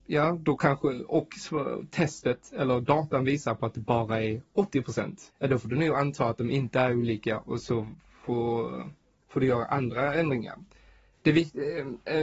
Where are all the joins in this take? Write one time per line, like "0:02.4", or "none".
0:05.3